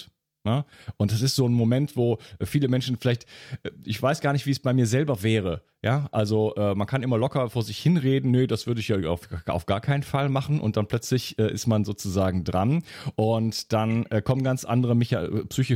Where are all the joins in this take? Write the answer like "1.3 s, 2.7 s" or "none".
none